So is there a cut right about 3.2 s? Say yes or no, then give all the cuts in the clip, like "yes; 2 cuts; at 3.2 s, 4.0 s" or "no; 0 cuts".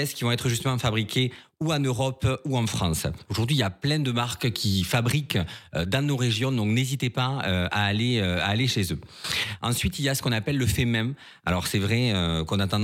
yes; 1 cut; at 3.2 s